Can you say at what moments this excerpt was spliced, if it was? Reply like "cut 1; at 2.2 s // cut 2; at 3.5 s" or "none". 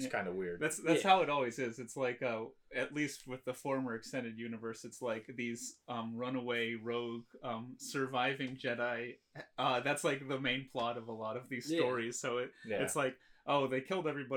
none

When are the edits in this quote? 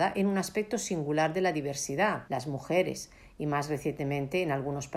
cut 1; at 2.3 s

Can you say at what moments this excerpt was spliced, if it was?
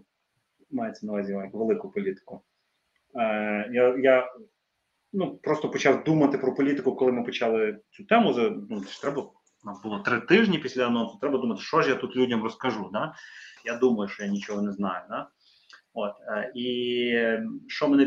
cut 1; at 13.6 s

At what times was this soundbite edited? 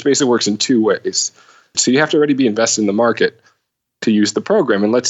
cut 1; at 1.7 s

